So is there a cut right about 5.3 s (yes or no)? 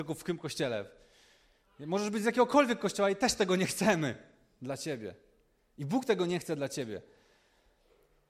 no